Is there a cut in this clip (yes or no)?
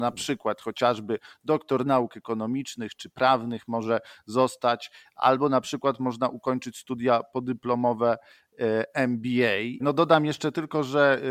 yes